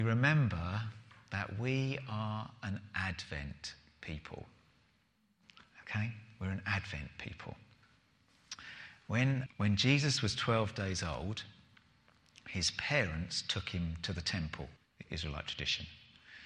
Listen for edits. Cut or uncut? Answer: cut